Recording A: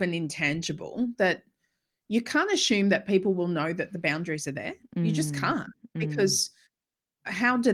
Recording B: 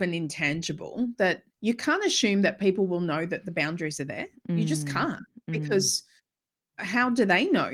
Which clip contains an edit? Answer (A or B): B